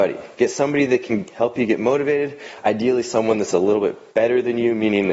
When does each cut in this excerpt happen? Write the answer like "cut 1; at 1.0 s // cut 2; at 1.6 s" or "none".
none